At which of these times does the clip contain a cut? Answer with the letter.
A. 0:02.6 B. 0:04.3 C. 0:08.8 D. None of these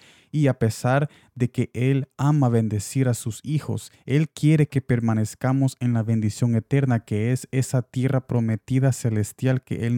D